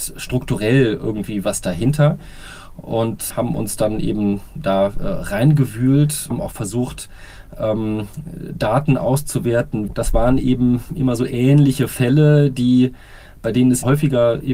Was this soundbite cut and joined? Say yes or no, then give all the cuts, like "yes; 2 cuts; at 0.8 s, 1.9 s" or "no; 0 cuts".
yes; 1 cut; at 9.9 s